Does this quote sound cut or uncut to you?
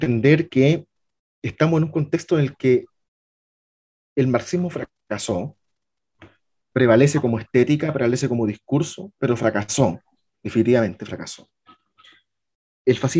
uncut